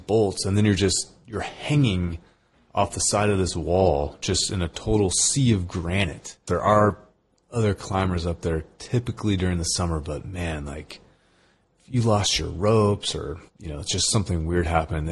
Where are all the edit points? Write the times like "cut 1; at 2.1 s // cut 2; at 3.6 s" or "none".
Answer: cut 1; at 6.5 s // cut 2; at 13.5 s